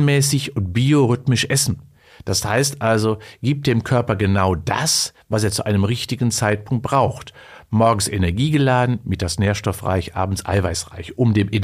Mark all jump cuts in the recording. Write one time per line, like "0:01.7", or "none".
none